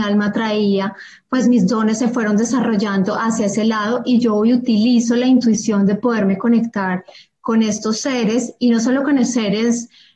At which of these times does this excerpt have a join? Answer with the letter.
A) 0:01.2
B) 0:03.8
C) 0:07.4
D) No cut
D